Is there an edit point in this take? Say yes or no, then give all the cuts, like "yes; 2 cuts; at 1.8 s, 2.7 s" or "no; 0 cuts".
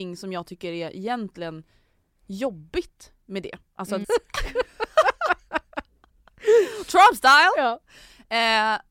yes; 1 cut; at 4.0 s